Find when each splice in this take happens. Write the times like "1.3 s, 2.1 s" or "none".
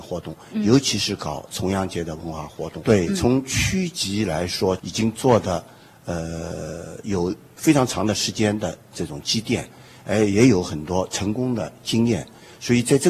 2.8 s, 4.8 s

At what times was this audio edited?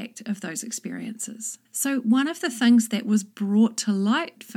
1.6 s

